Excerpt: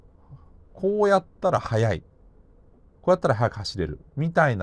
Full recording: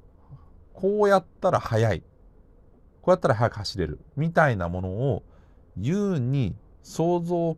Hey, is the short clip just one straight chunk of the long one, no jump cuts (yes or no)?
yes